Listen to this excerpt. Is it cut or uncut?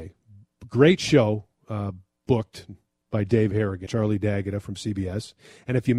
cut